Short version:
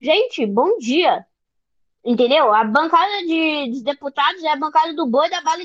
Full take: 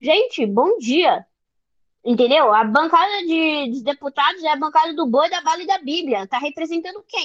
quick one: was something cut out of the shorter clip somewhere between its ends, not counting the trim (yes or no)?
no